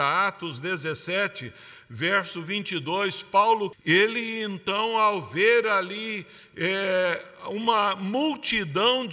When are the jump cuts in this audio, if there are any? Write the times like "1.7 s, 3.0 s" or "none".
3.7 s